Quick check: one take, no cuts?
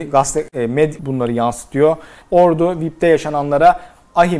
no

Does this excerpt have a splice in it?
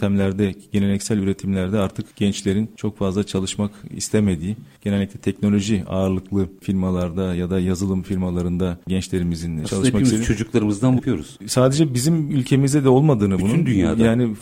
yes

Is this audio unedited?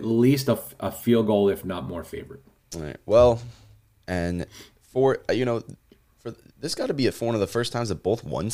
yes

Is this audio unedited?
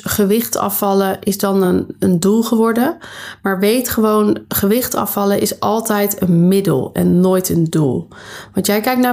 yes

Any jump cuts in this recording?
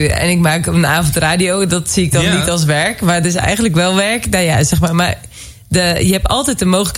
no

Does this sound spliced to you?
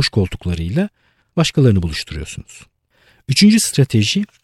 no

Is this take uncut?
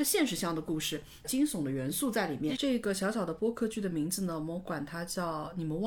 no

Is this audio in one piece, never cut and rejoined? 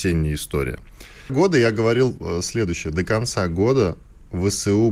no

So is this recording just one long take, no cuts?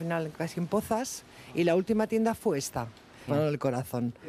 no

